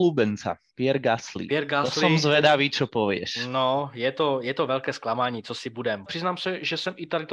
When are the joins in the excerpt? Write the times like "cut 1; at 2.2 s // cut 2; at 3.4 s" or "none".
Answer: cut 1; at 6.1 s